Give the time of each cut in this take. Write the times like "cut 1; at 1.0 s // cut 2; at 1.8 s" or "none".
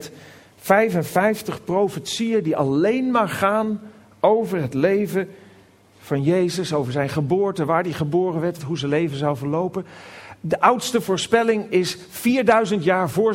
cut 1; at 8.6 s

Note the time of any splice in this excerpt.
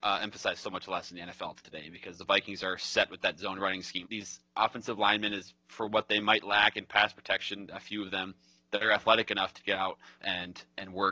cut 1; at 4.0 s // cut 2; at 10.2 s

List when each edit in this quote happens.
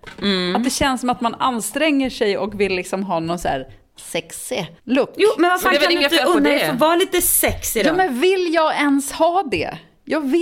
cut 1; at 4.8 s

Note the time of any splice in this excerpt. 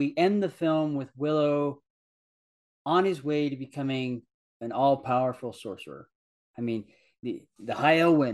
none

